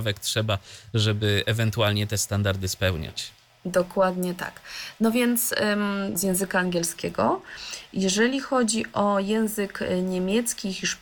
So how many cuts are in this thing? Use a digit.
1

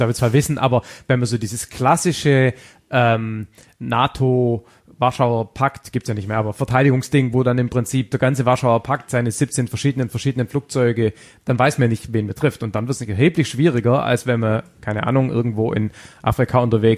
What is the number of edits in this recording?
0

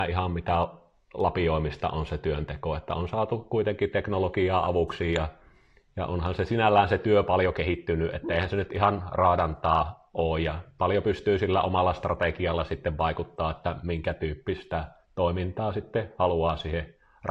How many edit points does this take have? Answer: 0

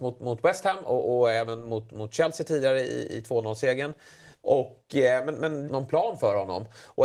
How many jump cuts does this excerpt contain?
2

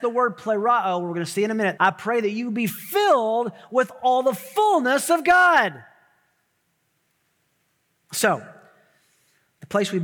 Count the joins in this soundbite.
2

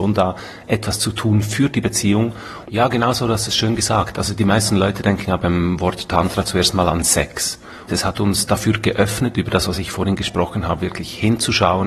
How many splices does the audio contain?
2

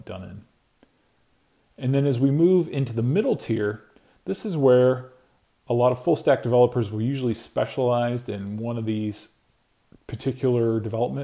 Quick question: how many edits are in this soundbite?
0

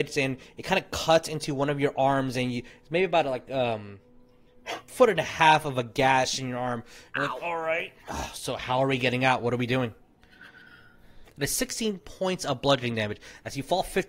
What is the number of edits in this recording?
1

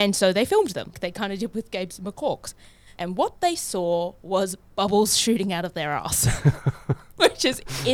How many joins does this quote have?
2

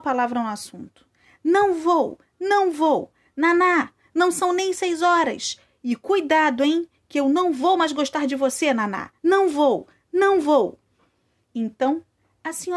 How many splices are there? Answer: 1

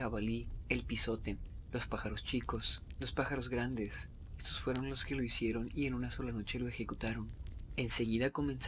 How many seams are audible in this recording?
0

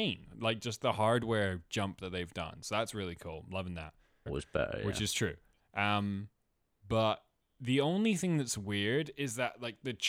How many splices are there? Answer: 1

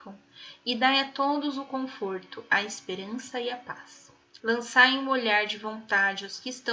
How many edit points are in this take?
1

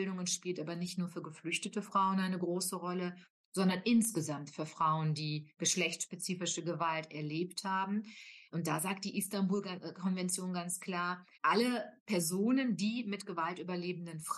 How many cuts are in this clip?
1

